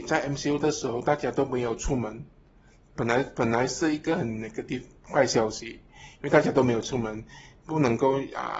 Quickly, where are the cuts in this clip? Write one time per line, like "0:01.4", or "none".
none